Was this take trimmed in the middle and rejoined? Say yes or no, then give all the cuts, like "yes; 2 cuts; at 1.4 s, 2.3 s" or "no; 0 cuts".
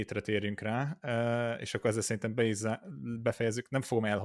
no; 0 cuts